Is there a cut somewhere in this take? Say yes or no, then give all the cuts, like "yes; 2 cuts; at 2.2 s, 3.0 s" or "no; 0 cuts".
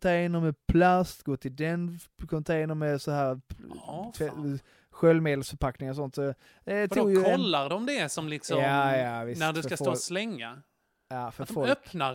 no; 0 cuts